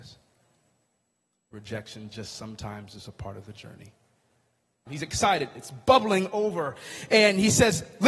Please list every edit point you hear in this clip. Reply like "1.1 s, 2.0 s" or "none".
4.9 s